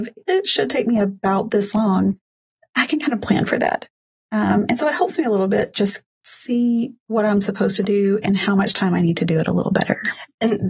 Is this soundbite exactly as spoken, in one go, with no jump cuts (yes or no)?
yes